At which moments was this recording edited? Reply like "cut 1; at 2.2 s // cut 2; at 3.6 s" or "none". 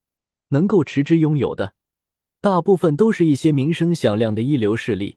none